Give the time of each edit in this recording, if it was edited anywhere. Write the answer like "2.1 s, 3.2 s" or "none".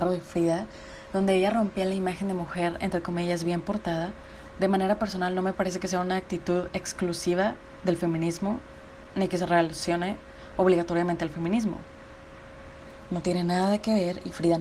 13.1 s